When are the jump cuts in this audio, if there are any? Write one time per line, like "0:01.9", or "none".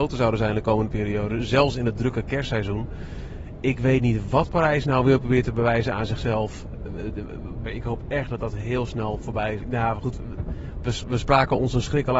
0:07.7
0:09.6